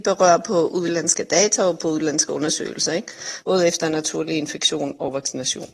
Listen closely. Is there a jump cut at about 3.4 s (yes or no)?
yes